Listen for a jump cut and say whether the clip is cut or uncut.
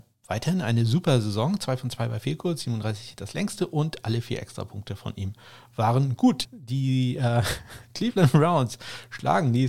cut